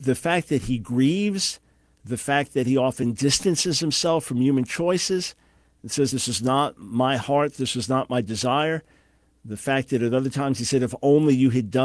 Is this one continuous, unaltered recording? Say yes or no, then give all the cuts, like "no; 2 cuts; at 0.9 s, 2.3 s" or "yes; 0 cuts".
yes; 0 cuts